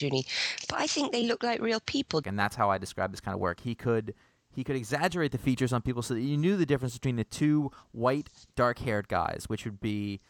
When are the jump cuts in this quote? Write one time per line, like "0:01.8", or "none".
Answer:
0:02.2
0:03.6